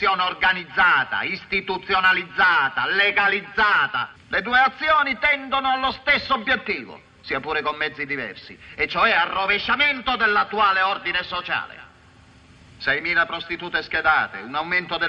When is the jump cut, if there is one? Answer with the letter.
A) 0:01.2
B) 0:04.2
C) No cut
B